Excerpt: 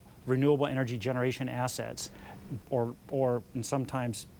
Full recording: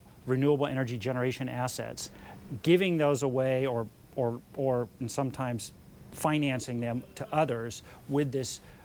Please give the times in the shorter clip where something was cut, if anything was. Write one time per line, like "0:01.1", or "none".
0:02.6